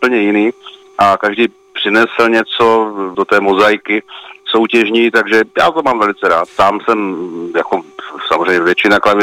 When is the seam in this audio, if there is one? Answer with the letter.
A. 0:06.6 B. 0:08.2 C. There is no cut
A